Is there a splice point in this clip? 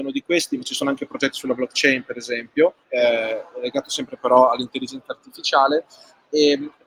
yes; 1 cut; at 2.8 s

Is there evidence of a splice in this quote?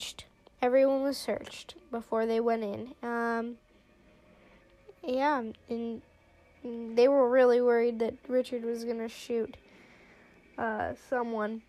no; 0 cuts

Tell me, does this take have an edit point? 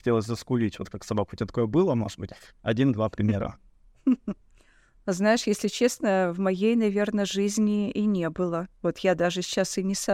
no; 0 cuts

